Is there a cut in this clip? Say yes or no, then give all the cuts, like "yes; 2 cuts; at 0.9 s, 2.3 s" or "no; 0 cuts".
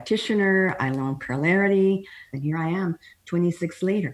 yes; 1 cut; at 2.3 s